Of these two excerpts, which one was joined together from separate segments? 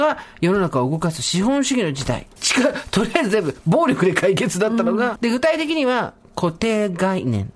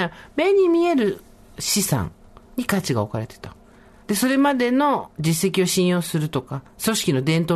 first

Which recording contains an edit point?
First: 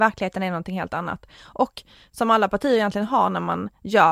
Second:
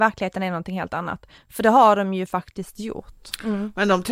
second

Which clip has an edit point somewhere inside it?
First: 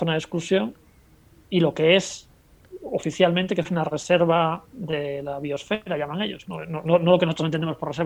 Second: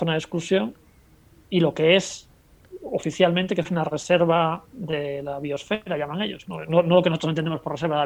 second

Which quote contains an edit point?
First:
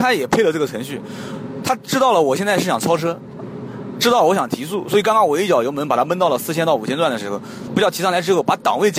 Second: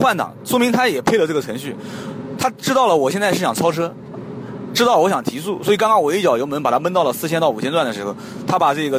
first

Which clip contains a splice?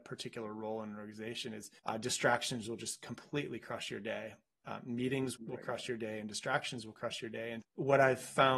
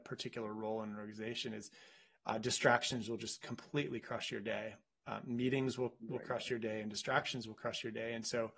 first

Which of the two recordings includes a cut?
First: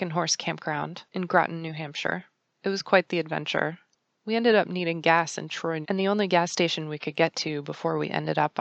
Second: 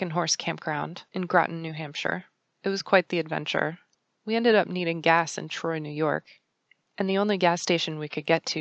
first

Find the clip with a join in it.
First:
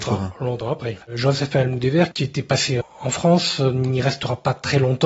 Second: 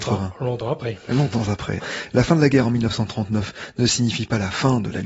first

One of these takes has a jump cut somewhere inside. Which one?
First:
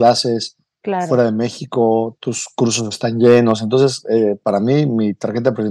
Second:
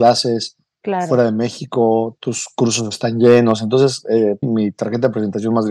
second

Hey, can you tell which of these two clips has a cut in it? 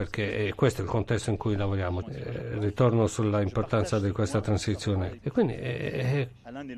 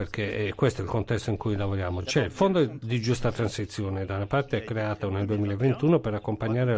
first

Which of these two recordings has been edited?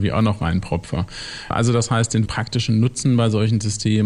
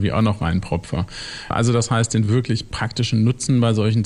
first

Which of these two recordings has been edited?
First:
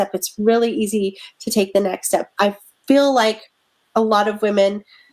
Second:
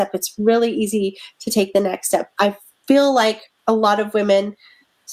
second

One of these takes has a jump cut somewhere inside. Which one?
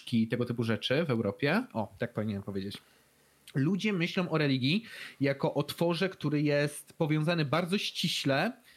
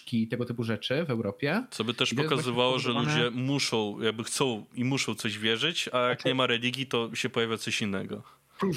first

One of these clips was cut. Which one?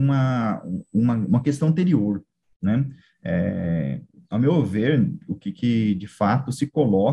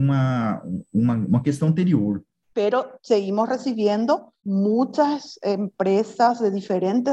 second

